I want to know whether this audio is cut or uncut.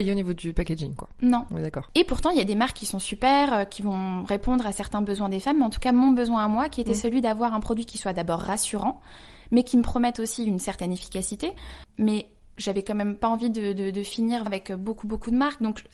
cut